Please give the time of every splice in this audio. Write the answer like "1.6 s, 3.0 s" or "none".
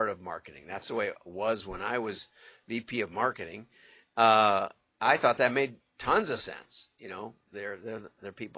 none